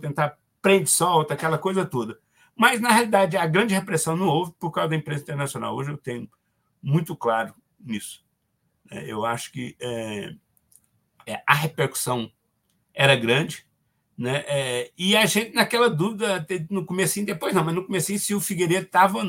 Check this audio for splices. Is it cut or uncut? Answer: uncut